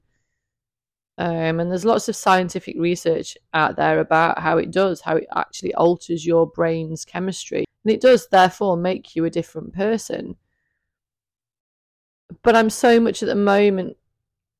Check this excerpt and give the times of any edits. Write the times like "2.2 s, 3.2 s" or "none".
7.6 s